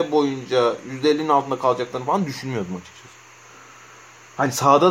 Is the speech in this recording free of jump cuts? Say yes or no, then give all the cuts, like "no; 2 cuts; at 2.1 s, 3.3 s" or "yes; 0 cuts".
yes; 0 cuts